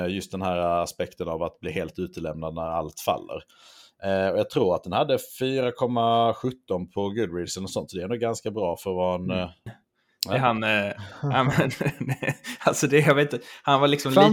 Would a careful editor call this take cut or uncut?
cut